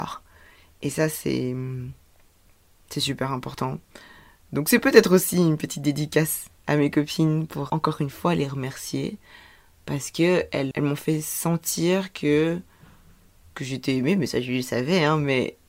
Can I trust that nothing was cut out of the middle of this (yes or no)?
no